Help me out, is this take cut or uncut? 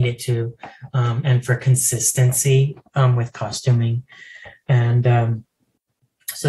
uncut